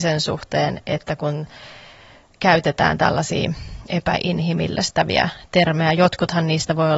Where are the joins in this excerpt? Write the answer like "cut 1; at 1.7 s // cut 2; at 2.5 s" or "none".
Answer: none